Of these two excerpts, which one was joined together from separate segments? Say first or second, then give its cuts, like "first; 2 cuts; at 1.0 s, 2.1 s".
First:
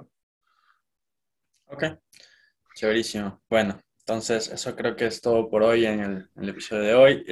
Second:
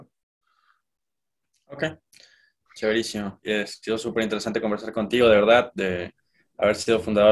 second; 1 cut; at 3.4 s